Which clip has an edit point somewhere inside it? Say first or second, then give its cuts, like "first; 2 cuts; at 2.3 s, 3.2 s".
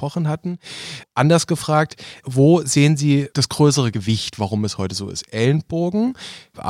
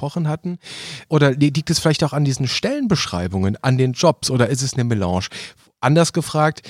first; 1 cut; at 1.0 s